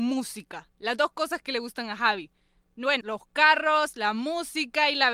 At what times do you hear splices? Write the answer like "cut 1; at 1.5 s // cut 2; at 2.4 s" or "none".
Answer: cut 1; at 3.0 s